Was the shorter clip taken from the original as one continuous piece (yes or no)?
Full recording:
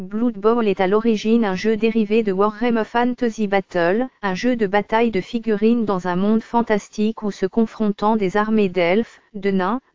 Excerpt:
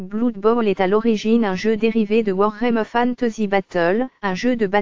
yes